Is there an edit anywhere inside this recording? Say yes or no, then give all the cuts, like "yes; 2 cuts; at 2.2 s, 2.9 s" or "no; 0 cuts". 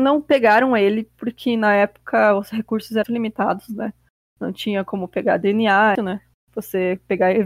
yes; 2 cuts; at 3.0 s, 6.0 s